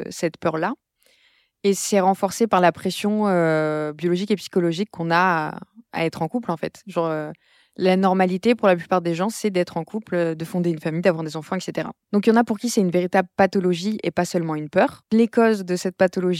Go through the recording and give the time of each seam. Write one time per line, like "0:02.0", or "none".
none